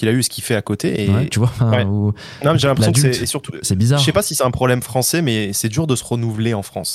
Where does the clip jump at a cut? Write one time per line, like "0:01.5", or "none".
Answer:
0:01.3